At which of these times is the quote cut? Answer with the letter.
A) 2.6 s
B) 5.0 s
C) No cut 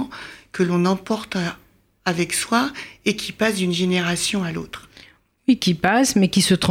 C